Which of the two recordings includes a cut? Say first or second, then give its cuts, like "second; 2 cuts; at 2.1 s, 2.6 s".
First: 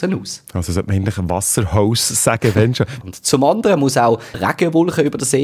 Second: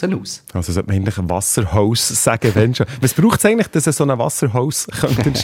first; 2 cuts; at 3.0 s, 4.3 s